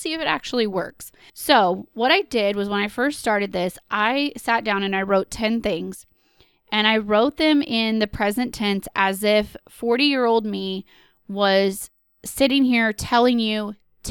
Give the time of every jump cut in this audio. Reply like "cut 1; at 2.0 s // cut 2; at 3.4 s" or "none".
cut 1; at 1.3 s